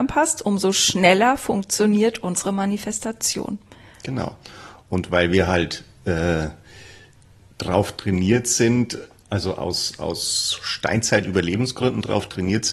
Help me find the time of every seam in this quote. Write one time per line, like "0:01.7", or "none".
none